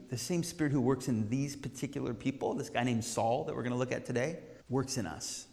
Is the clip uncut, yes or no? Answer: no